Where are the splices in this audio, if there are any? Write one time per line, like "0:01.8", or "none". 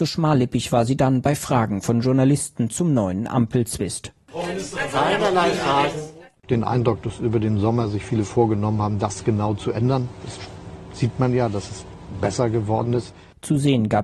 0:06.4